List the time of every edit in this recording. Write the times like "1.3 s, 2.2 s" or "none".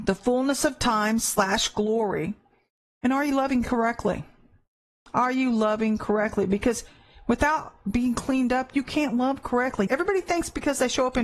9.9 s